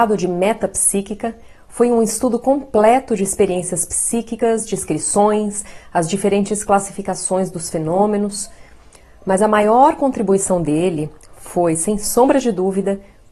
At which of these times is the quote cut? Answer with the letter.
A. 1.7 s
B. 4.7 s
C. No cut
C